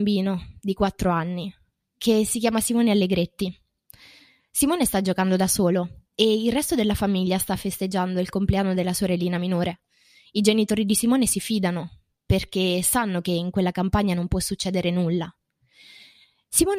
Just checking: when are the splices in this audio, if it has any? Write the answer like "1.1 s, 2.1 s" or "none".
none